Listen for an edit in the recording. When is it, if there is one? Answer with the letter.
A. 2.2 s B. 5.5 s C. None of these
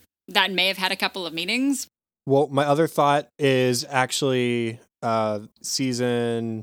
B